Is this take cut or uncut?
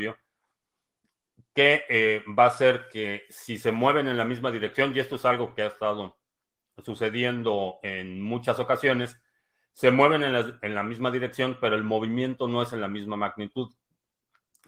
uncut